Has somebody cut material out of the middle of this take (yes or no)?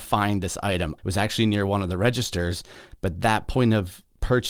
yes